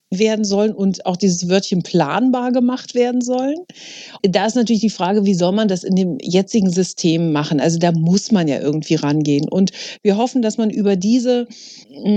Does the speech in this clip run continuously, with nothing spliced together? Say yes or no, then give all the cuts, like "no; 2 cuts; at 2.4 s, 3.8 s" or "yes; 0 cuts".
yes; 0 cuts